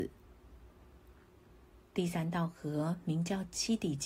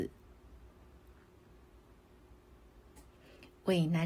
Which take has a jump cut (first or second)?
first